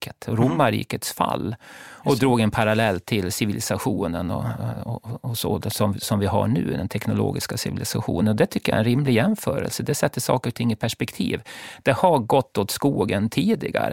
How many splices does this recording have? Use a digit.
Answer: 0